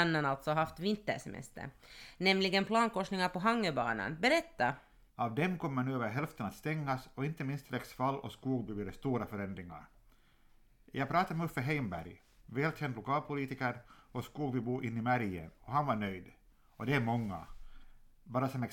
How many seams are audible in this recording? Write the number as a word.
two